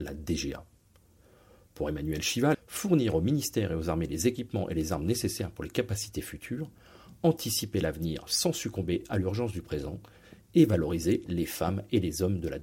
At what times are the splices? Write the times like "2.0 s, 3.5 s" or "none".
2.5 s